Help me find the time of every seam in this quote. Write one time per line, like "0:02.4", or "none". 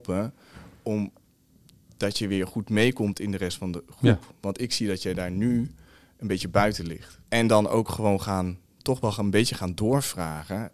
none